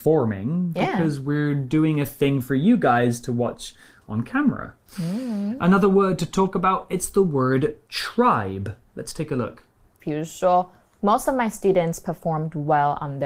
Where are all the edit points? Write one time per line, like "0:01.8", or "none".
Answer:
0:10.0